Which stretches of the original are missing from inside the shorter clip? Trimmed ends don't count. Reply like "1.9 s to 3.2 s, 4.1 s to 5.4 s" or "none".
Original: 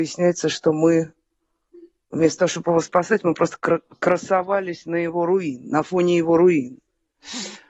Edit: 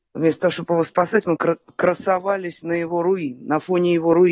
3.3 s to 3.6 s